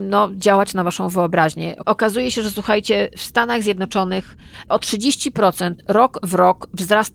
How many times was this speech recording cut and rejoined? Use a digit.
1